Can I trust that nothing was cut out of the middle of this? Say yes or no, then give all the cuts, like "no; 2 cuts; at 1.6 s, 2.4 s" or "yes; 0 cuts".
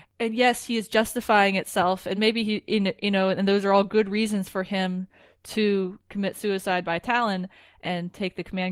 yes; 0 cuts